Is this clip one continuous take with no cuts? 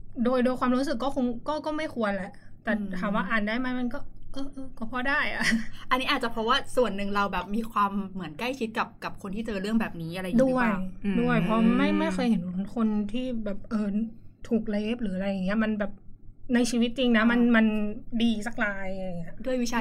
yes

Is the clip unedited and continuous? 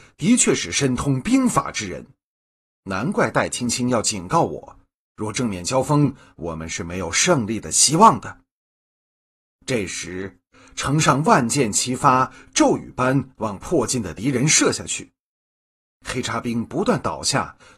yes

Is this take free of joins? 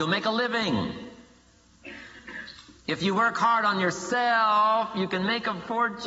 no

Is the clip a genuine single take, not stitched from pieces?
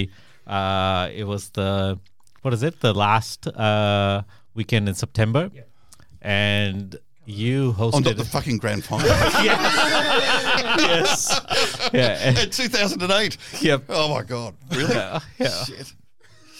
yes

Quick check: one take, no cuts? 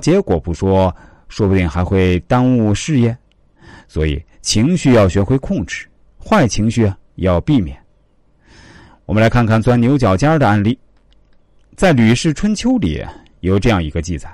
yes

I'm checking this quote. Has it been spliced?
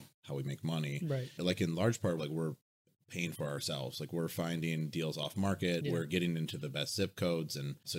yes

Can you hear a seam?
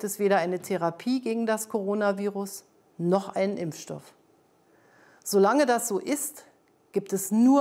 no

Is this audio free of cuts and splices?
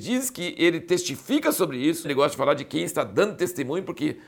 no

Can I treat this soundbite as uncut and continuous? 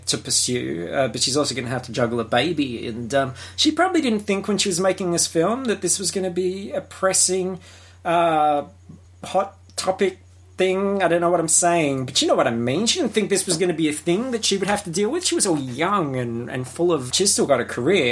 no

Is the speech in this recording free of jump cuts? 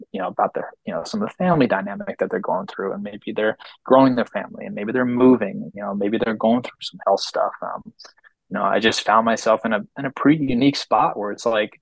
yes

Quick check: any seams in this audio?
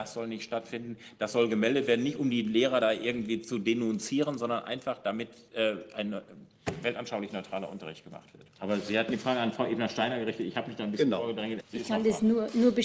yes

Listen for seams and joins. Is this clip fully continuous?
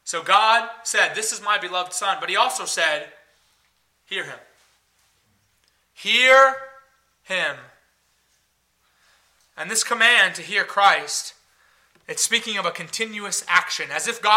yes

